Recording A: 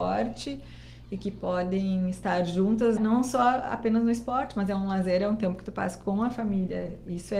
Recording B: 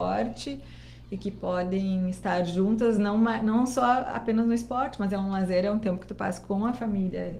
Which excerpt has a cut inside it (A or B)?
A